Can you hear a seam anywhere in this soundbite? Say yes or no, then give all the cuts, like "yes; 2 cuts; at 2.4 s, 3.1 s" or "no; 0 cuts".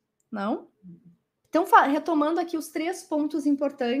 yes; 1 cut; at 1.4 s